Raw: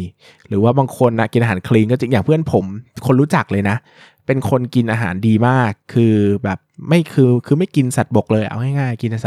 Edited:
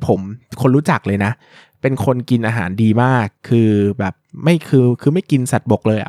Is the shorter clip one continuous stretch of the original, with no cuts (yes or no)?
yes